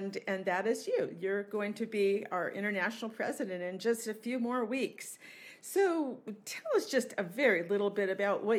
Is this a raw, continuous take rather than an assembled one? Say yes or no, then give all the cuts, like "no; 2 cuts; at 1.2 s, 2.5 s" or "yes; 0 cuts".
yes; 0 cuts